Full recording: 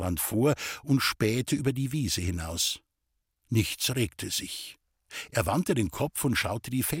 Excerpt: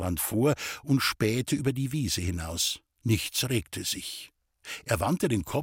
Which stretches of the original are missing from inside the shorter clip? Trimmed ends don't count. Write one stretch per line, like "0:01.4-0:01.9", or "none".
0:02.9-0:03.4